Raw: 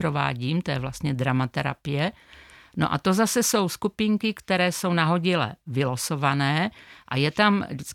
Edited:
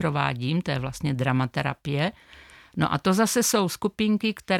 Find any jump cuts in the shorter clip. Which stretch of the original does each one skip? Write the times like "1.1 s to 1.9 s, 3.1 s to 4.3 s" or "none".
none